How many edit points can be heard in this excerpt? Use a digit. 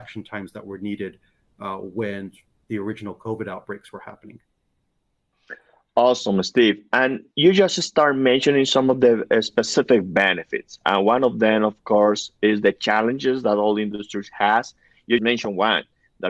1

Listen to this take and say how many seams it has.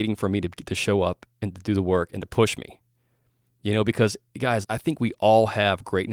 1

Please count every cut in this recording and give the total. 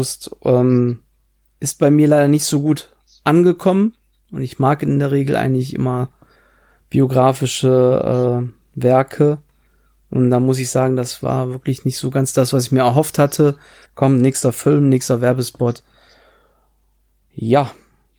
1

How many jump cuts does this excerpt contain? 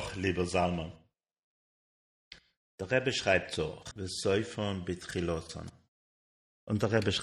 2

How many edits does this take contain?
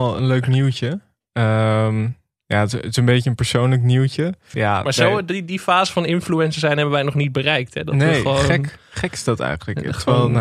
1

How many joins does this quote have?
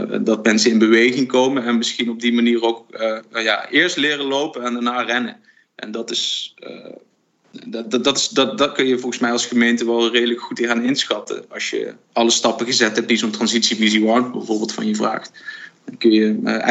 1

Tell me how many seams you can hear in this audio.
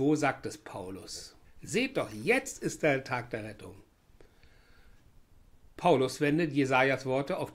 1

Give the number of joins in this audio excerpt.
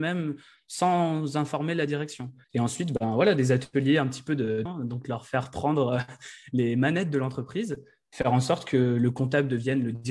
2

